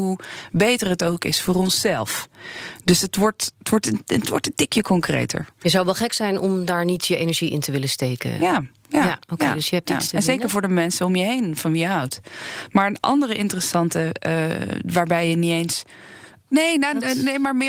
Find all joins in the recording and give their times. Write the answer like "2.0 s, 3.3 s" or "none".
16.5 s